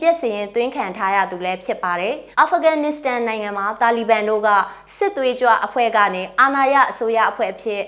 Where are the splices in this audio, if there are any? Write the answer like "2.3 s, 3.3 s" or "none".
2.3 s